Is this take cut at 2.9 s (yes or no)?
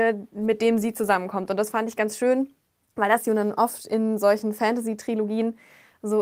no